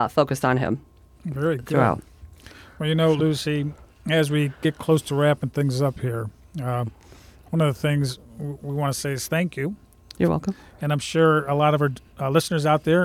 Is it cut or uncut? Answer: uncut